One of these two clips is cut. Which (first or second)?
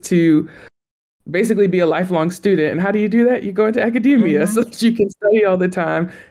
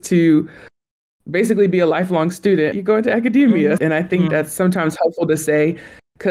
second